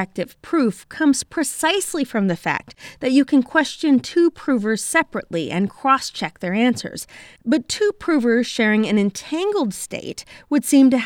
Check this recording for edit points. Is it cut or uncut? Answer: cut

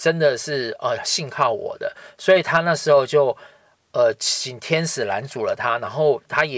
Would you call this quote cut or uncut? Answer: uncut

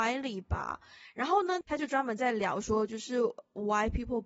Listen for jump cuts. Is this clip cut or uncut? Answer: cut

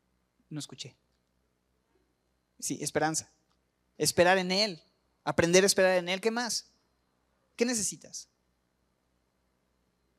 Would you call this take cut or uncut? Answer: cut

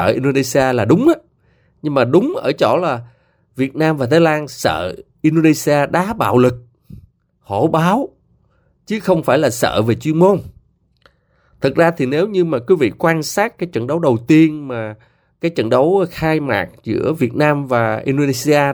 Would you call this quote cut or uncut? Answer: uncut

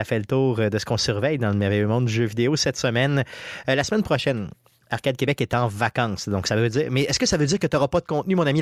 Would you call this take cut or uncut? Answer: uncut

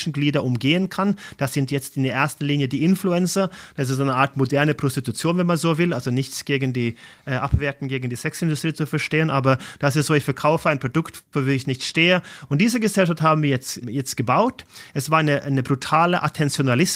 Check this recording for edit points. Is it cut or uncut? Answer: cut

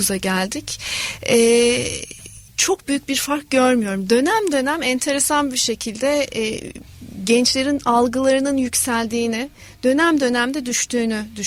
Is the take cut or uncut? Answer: cut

